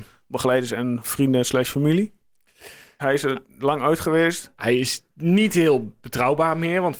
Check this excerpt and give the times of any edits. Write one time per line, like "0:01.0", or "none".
0:03.0